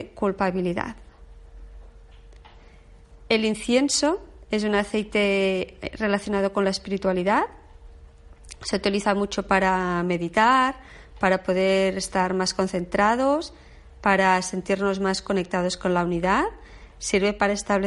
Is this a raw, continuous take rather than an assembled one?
yes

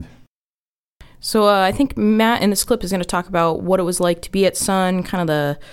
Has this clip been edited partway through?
no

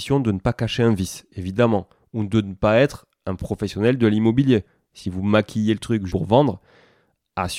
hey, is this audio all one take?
no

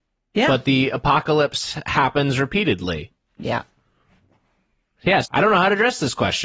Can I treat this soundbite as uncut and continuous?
no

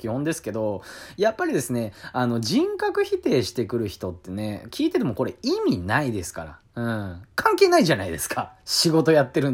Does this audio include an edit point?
no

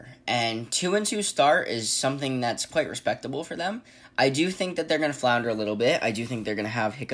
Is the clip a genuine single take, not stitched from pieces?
yes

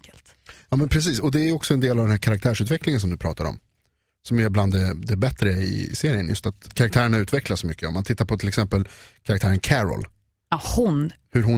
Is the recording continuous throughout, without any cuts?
no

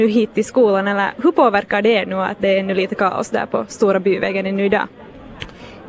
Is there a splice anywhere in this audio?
no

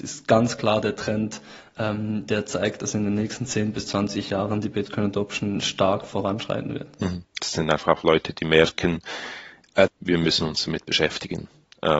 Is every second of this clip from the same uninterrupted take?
no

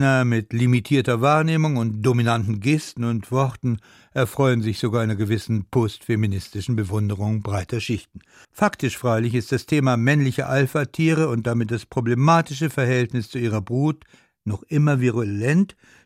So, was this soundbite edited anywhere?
yes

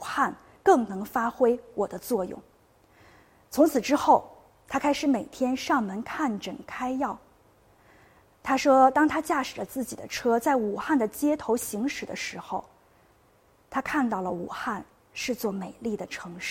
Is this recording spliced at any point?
no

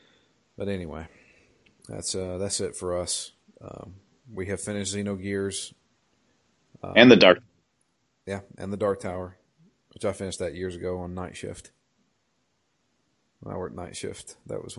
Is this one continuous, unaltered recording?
yes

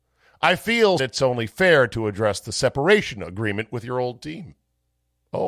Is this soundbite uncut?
no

